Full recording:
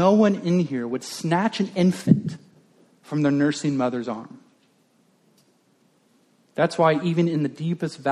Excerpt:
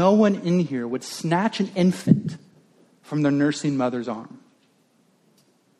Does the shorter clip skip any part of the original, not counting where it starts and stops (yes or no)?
no